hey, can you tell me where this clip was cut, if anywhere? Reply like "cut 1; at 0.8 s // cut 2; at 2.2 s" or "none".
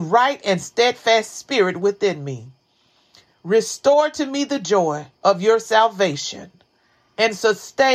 cut 1; at 3.3 s // cut 2; at 5.1 s

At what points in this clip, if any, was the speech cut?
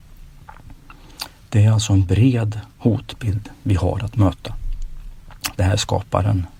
cut 1; at 2.7 s // cut 2; at 5.5 s

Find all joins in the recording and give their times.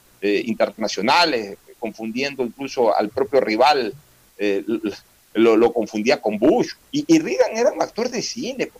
cut 1; at 6.8 s

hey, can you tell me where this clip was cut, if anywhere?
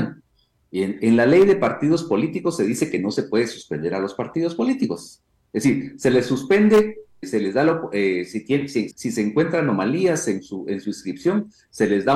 cut 1; at 7.2 s // cut 2; at 8.9 s

